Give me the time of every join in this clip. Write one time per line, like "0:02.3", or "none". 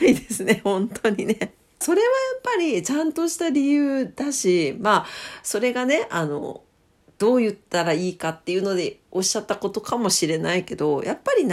0:01.8